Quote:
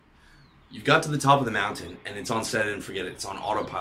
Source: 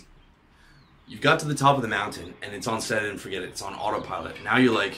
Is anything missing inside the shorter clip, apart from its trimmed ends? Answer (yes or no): no